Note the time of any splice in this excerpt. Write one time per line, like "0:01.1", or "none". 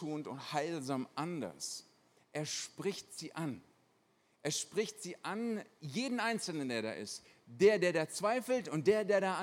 0:02.2